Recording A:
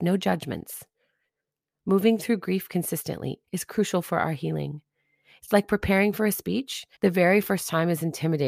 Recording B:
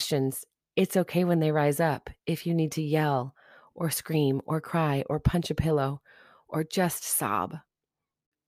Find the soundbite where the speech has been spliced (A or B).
A